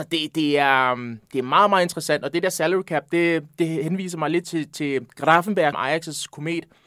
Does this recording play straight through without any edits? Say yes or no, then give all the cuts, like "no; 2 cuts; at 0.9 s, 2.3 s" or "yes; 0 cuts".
no; 2 cuts; at 4.4 s, 5.7 s